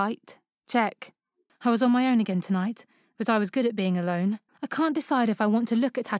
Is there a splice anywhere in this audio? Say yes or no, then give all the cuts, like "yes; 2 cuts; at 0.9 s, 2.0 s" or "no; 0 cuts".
yes; 2 cuts; at 1.5 s, 4.5 s